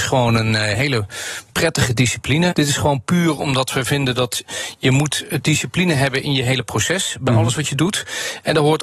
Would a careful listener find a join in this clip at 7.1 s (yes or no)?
no